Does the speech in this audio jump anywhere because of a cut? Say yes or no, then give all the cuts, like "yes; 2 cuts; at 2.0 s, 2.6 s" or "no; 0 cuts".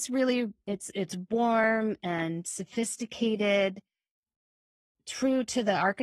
no; 0 cuts